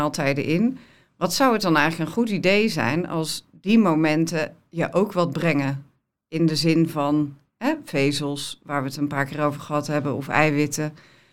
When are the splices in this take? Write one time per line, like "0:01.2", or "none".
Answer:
none